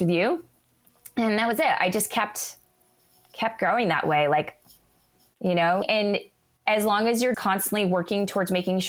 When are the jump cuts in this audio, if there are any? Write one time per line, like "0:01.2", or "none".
0:05.8
0:07.3